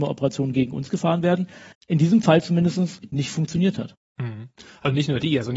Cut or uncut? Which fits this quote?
uncut